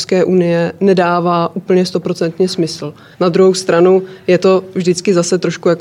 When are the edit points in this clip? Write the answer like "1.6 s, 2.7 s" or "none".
3.1 s